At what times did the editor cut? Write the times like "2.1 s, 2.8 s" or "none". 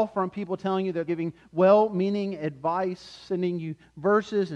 1.1 s